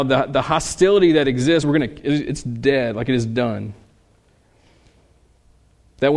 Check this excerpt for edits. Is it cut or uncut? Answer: uncut